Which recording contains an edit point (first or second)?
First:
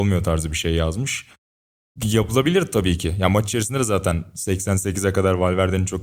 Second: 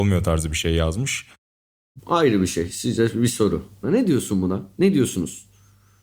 second